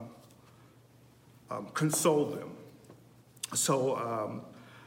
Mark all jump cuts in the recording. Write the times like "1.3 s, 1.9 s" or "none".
none